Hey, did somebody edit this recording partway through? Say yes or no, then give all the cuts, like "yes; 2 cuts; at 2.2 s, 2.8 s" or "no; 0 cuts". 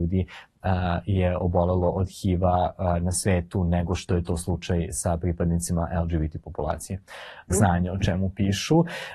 yes; 1 cut; at 7.5 s